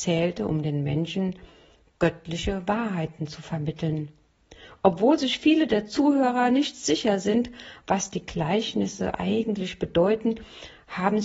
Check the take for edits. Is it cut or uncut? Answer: uncut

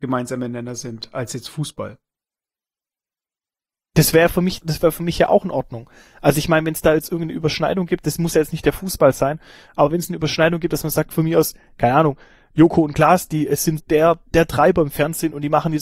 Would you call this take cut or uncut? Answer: cut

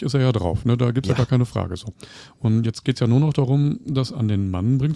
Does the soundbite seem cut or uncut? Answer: uncut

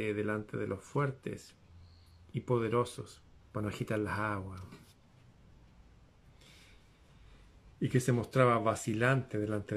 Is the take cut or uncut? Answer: cut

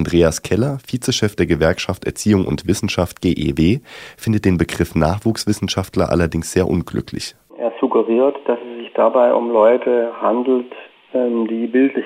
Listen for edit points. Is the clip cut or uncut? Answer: uncut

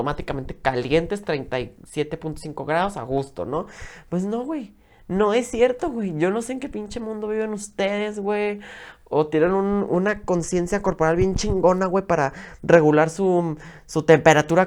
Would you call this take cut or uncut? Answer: uncut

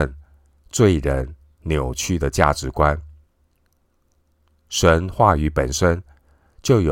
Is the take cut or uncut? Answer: uncut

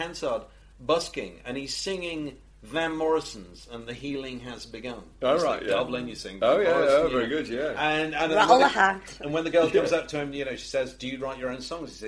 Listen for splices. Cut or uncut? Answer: uncut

